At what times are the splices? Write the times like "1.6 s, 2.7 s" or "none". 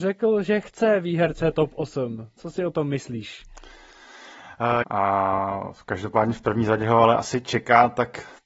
4.8 s